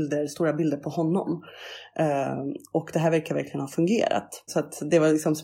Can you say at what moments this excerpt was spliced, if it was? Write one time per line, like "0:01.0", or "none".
0:04.5

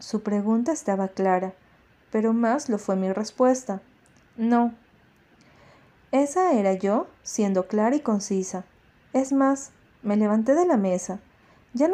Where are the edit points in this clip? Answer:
none

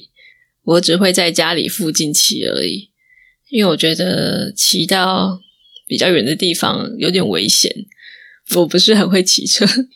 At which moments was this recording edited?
none

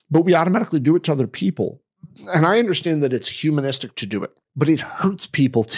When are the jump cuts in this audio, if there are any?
0:04.4

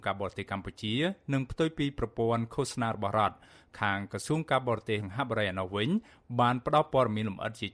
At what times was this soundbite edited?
0:05.0

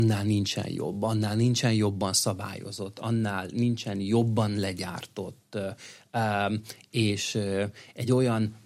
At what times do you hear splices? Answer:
none

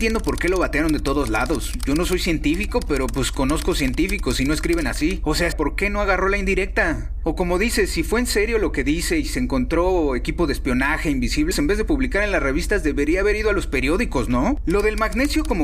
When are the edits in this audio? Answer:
0:05.5
0:11.5

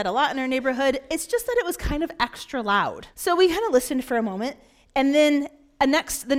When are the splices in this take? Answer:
0:03.1

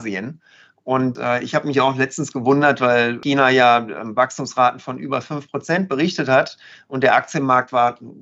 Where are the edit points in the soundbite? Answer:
none

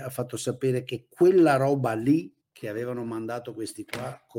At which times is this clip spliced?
0:02.4

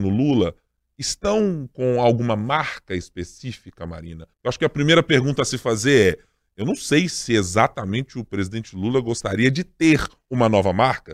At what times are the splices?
0:04.3

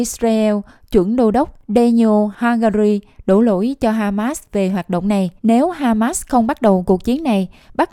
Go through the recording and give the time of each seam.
0:05.4

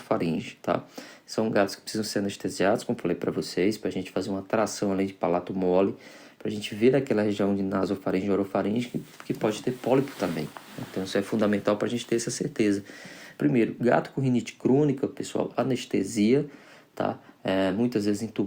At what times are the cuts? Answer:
0:13.4
0:15.5

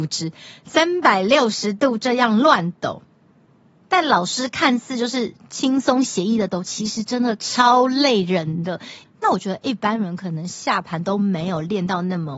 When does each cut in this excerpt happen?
0:09.0

